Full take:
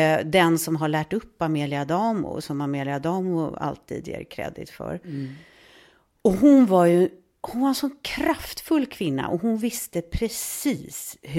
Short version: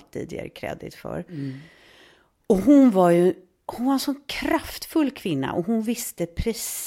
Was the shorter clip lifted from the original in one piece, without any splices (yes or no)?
yes